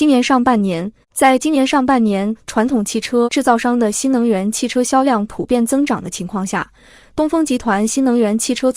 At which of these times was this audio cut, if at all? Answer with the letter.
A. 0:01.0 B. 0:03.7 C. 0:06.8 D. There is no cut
A